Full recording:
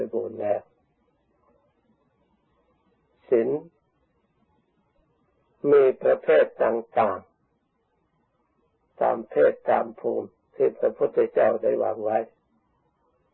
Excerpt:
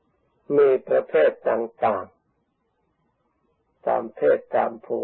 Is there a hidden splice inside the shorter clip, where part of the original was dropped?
no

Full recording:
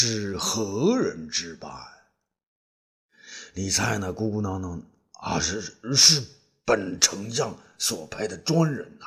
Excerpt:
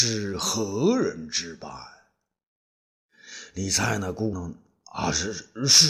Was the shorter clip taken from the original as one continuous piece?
no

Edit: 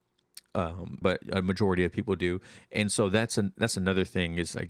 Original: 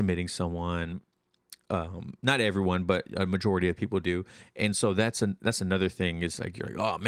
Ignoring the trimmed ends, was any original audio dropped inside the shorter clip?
yes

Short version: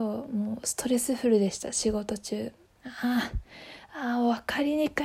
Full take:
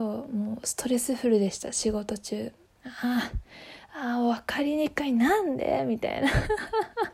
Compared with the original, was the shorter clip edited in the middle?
no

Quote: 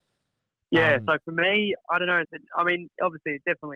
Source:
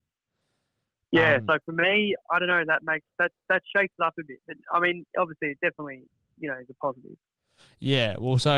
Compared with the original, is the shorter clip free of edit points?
no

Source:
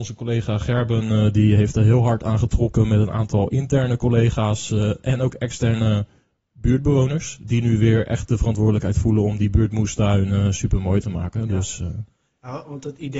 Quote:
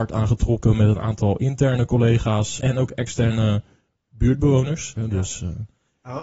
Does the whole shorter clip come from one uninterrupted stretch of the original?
no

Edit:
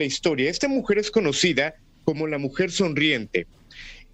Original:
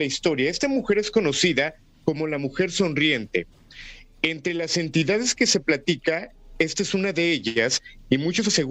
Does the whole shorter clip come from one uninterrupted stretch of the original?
yes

